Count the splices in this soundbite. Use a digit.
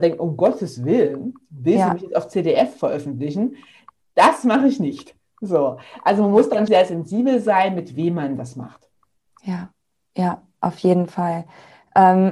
1